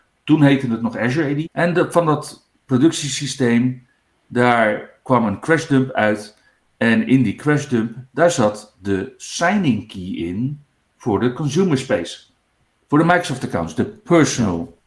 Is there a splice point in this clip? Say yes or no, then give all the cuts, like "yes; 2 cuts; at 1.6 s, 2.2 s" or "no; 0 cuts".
yes; 1 cut; at 1.4 s